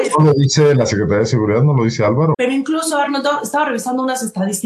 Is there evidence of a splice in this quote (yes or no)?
yes